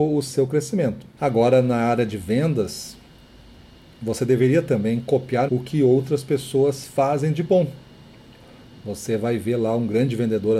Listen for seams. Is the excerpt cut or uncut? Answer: cut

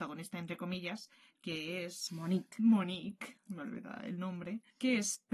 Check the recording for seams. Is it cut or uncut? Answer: uncut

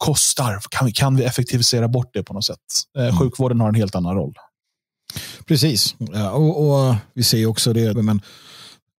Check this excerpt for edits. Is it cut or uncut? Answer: cut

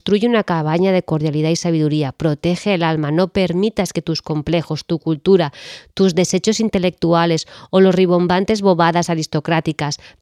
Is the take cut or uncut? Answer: uncut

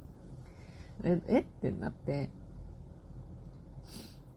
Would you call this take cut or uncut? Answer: cut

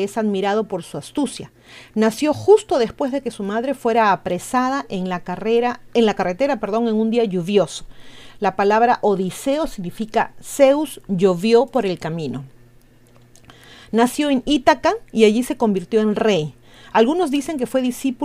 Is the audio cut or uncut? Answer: uncut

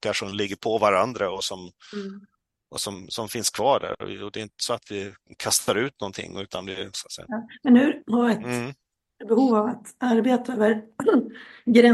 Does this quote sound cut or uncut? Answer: cut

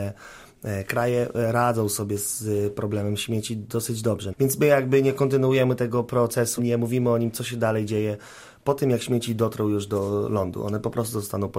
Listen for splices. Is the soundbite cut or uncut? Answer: cut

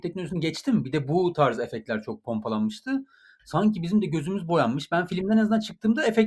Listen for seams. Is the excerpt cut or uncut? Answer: uncut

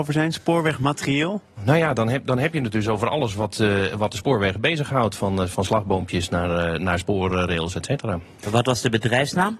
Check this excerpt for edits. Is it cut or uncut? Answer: uncut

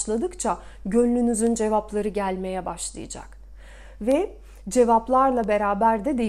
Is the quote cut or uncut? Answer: uncut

